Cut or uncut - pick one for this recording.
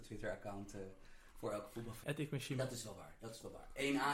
cut